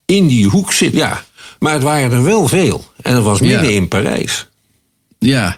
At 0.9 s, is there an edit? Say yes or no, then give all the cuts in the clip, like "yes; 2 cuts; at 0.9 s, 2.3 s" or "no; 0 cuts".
yes; 1 cut; at 0.9 s